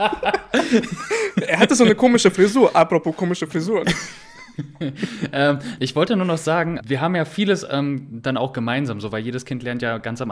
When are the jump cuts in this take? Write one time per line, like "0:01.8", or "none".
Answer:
0:05.8
0:06.8